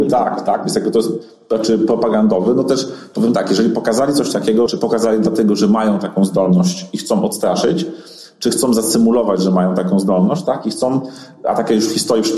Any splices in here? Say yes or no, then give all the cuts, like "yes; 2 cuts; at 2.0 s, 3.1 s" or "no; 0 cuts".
yes; 1 cut; at 4.7 s